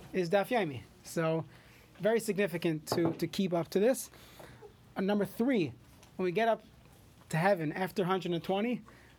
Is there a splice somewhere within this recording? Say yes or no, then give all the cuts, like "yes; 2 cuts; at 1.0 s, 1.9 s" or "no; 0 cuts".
no; 0 cuts